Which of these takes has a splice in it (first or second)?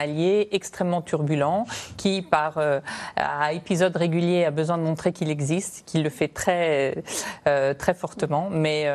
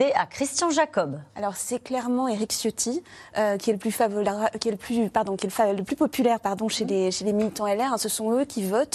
second